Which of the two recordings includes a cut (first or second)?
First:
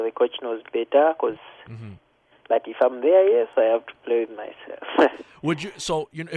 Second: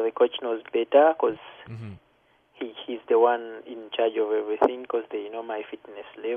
first